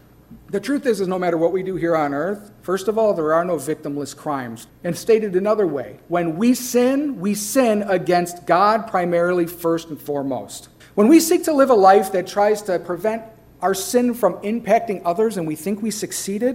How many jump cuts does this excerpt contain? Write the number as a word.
two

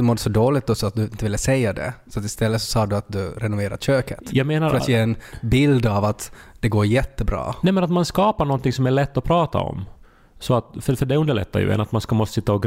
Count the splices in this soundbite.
zero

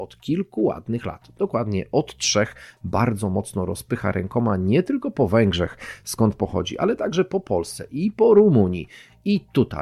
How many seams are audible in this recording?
zero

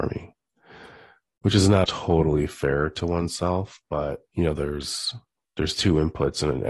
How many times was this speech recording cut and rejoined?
two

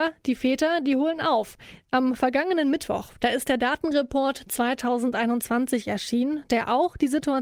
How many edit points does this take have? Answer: one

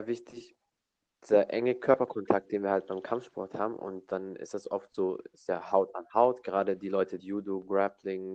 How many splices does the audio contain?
one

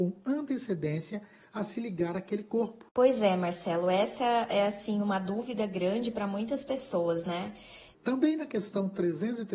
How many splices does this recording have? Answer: one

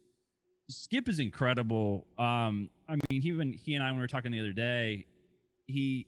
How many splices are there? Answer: zero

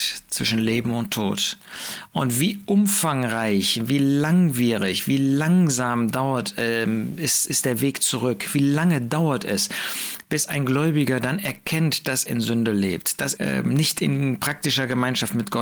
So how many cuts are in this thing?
two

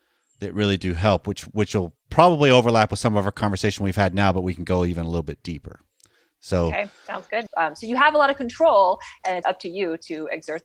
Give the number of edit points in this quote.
two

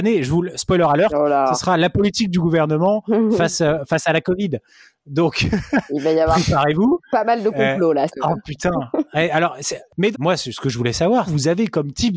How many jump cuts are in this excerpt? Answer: three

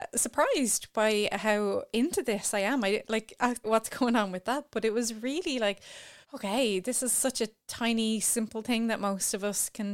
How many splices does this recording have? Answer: two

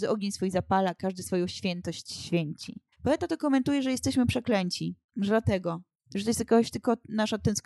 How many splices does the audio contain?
one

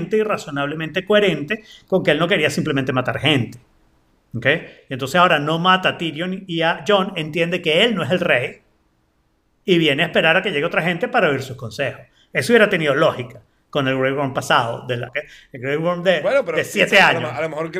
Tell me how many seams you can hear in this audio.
one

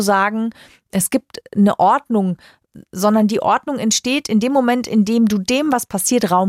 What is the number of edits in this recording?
zero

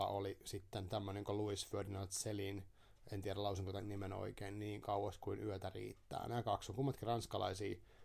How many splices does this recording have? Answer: zero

